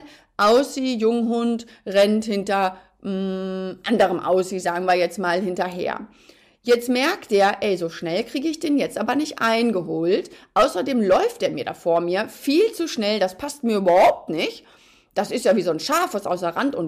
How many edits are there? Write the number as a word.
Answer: zero